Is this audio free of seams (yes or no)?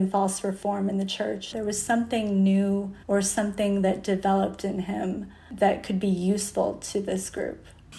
no